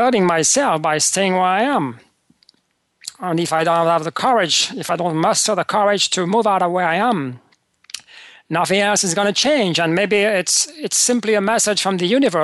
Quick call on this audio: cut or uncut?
uncut